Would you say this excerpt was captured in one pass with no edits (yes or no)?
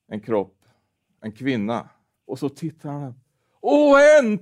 no